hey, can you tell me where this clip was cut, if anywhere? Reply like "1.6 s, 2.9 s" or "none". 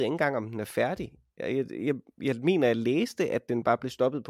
none